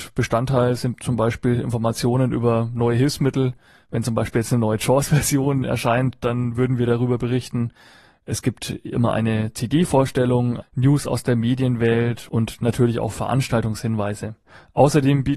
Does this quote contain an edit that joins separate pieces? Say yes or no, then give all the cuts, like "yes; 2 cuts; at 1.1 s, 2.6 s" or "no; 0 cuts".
yes; 1 cut; at 10.6 s